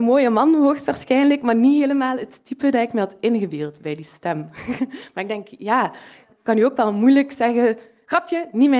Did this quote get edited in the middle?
no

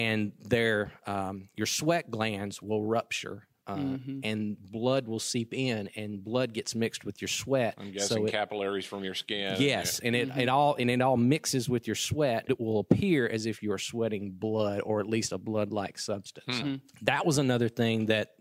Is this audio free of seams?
no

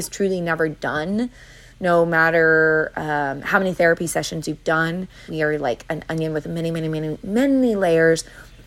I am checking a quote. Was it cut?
yes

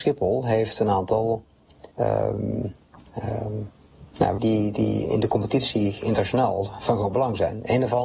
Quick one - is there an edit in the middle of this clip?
yes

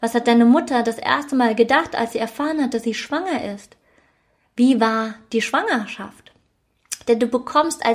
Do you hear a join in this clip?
no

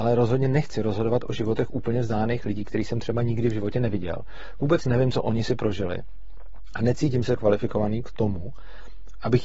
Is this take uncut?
yes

